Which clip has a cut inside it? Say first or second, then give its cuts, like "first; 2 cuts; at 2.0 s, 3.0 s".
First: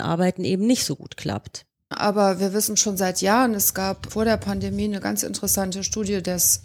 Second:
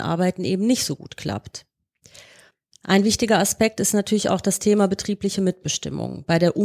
first; 2 cuts; at 1.9 s, 4.1 s